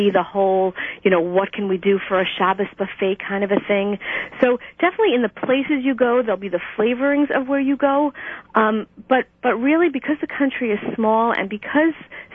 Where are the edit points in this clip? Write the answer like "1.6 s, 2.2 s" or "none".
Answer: none